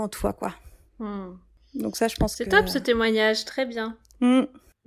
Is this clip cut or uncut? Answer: uncut